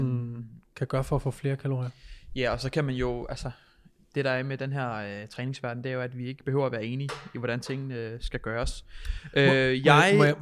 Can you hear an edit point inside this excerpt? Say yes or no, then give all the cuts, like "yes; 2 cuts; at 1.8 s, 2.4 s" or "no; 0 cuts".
no; 0 cuts